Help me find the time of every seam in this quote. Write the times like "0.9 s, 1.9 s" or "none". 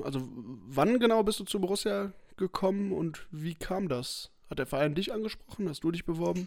none